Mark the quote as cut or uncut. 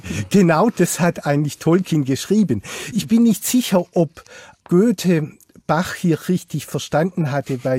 uncut